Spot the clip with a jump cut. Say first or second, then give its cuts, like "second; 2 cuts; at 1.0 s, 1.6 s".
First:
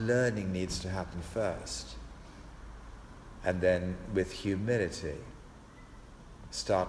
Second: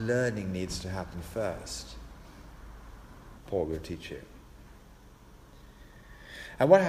second; 1 cut; at 3.4 s